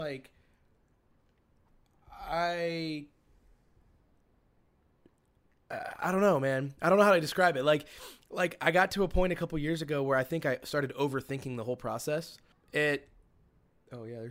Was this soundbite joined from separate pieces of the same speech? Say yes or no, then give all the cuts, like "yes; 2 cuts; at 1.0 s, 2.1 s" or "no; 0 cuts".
yes; 1 cut; at 12.5 s